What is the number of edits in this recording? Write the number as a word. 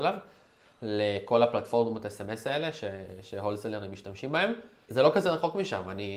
one